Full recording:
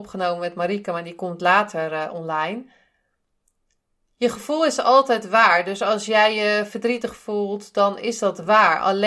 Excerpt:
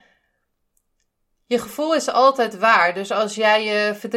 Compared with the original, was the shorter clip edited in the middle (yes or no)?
no